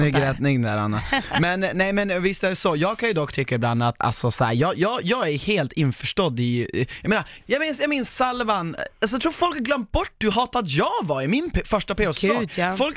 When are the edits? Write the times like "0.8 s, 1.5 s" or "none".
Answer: 4.0 s, 7.4 s